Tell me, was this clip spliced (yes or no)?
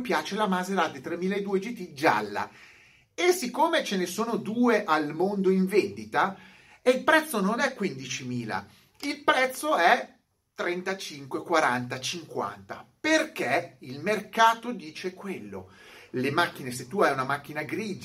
no